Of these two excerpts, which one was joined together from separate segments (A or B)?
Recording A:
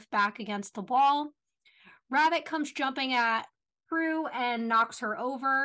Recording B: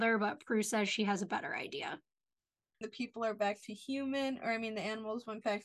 B